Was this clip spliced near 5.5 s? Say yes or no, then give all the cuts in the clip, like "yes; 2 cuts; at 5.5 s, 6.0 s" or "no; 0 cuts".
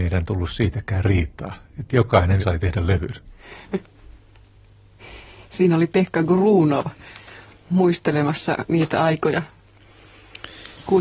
no; 1 cut; at 2.4 s